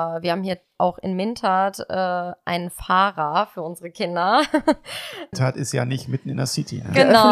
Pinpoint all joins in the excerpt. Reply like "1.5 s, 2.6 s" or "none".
5.3 s